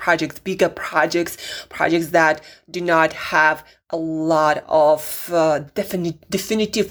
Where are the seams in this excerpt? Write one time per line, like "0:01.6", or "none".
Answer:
none